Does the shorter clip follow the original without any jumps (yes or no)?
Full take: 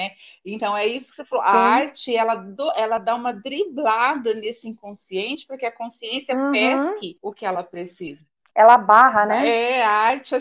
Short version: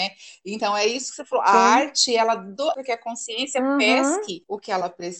no